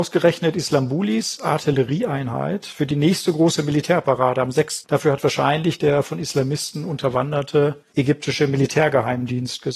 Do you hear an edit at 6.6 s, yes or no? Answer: no